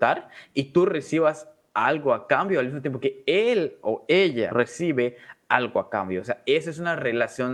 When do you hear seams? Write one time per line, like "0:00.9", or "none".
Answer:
0:04.5